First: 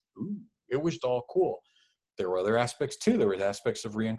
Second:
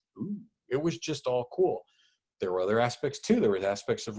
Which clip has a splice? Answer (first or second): first